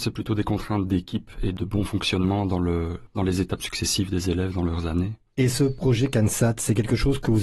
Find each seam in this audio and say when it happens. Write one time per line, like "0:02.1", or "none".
none